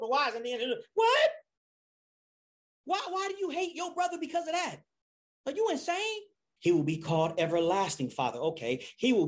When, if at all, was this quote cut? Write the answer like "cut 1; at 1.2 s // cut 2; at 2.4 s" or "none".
cut 1; at 6.6 s

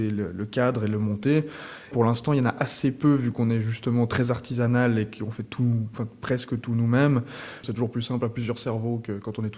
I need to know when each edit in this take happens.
cut 1; at 1.9 s // cut 2; at 7.6 s

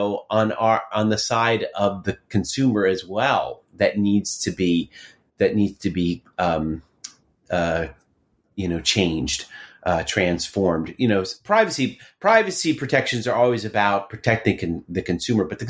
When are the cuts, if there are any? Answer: none

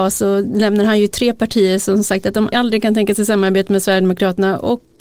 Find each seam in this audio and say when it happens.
cut 1; at 2.5 s

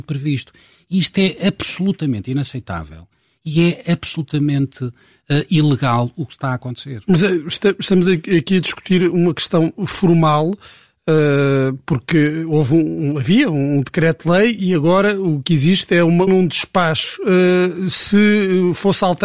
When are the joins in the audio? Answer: cut 1; at 16.3 s

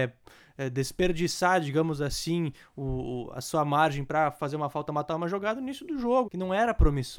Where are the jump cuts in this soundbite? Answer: cut 1; at 6.2 s

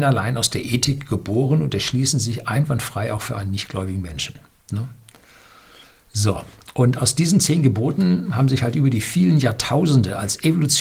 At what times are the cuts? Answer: none

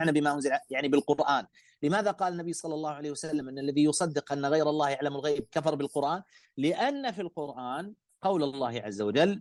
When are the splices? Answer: none

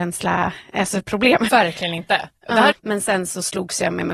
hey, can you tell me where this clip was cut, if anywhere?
cut 1; at 1.5 s // cut 2; at 2.7 s

